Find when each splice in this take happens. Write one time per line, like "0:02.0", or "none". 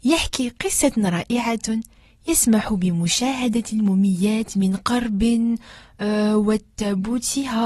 none